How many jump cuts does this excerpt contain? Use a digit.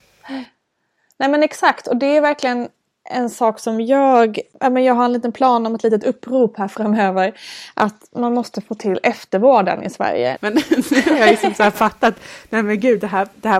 1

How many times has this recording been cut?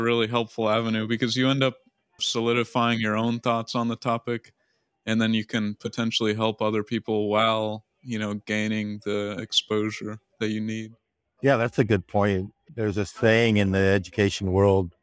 0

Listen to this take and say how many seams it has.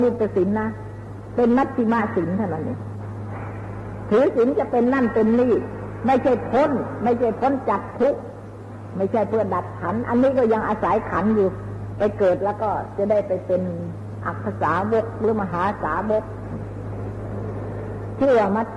0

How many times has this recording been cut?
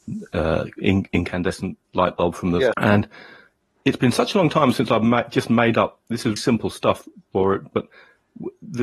2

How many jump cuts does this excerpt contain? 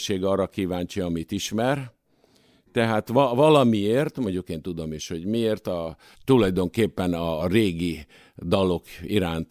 1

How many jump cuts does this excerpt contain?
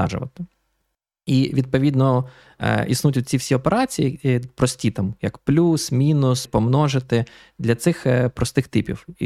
1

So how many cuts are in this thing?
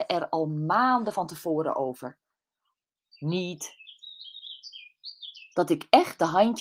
2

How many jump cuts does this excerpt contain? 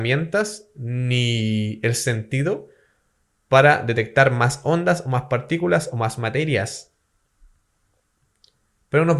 0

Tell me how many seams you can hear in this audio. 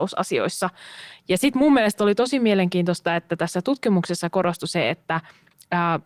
0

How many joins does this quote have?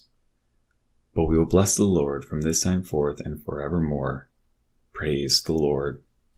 0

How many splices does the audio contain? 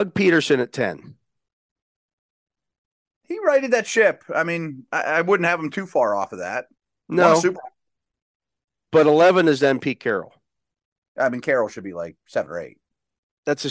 0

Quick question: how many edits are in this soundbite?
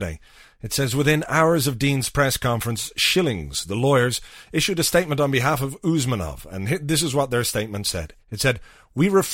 1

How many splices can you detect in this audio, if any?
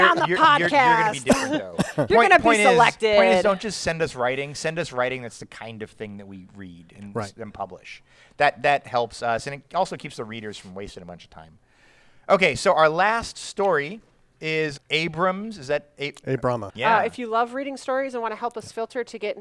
2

